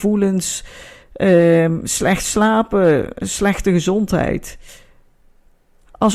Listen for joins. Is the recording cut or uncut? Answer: uncut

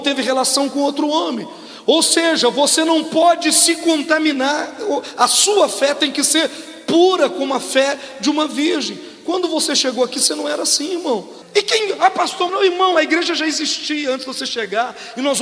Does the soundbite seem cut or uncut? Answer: cut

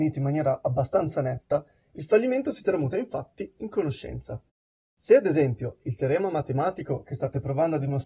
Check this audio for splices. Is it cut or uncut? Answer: uncut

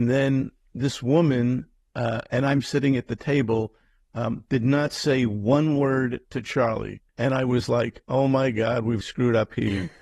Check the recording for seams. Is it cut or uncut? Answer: cut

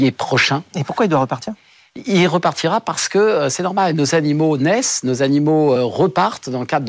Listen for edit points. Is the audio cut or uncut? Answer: cut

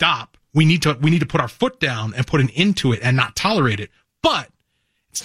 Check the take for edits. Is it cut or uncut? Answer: uncut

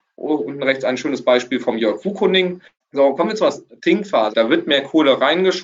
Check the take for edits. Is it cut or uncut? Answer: cut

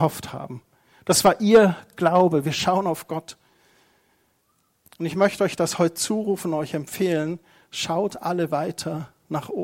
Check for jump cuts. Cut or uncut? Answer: uncut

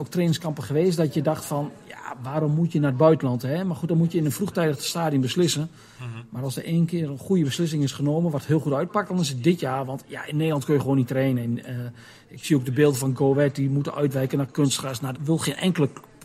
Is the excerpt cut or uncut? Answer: cut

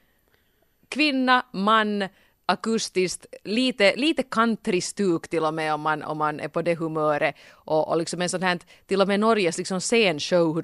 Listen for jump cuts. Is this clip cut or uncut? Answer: uncut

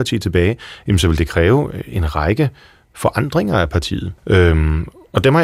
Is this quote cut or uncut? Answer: cut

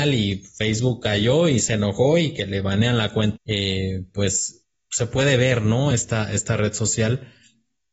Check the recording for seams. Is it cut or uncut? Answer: cut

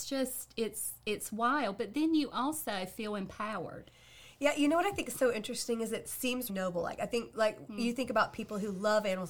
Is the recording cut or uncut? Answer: cut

